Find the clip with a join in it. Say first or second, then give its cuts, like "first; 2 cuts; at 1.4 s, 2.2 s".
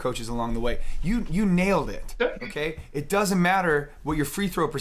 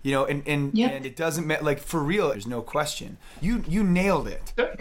second; 2 cuts; at 2.3 s, 3.4 s